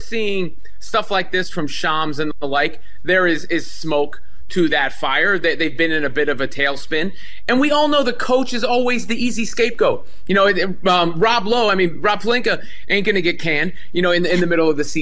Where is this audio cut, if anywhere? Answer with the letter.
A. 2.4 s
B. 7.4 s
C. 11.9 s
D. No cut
D